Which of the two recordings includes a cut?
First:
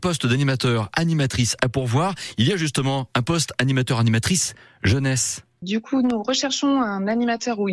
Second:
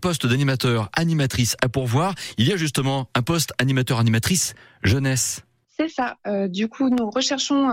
first; 1 cut; at 5.6 s

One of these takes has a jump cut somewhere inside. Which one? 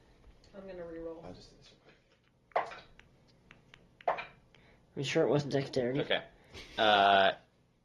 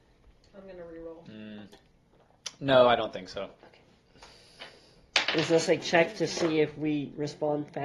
first; 1 cut; at 1.2 s

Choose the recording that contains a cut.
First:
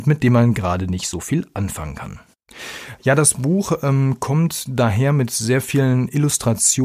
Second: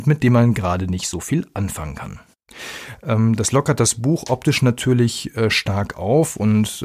second; 1 cut; at 3.0 s

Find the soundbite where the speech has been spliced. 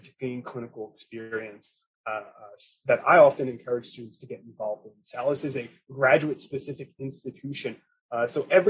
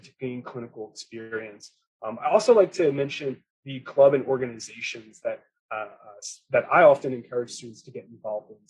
first; 1 cut; at 1.9 s

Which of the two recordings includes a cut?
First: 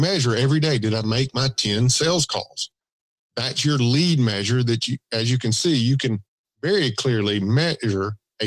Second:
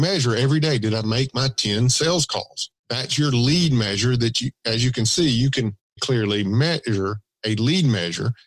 second; 2 cuts; at 2.8 s, 6.0 s

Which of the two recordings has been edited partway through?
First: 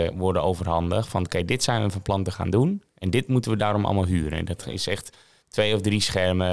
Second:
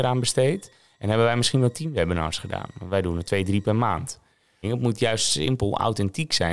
second; 1 cut; at 4.6 s

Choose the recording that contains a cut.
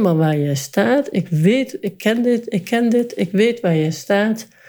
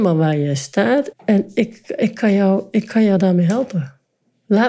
second; 1 cut; at 1.1 s

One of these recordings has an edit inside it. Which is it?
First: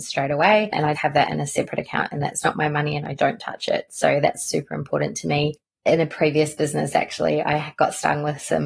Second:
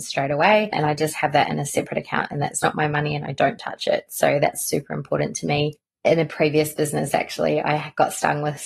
first; 1 cut; at 0.9 s

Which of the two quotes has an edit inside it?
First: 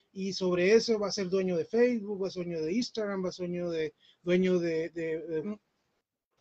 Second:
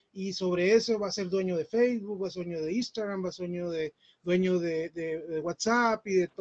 first; 1 cut; at 5.4 s

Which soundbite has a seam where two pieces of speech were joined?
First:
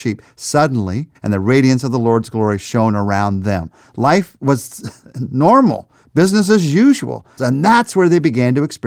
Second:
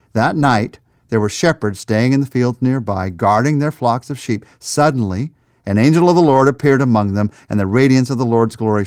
first; 2 cuts; at 1.1 s, 7.4 s

